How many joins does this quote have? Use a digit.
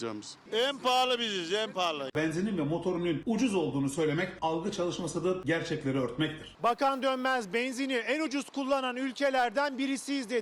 1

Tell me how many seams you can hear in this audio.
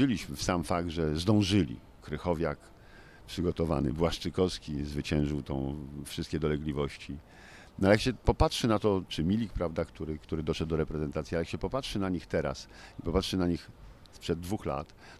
1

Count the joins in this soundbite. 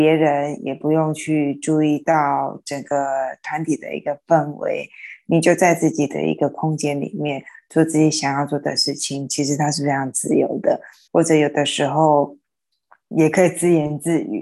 2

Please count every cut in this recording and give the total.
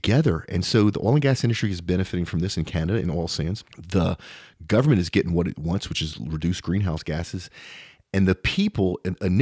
1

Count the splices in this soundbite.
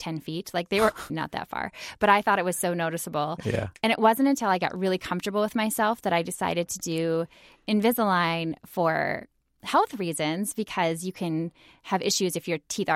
1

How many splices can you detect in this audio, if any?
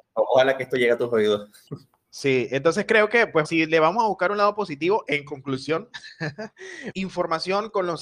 2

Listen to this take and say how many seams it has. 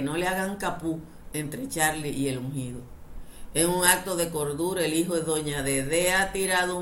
0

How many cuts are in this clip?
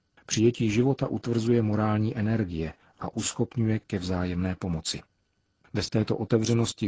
0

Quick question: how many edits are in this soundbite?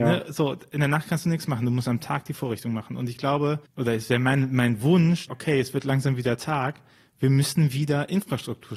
1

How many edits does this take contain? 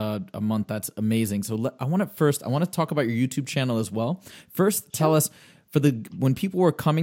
0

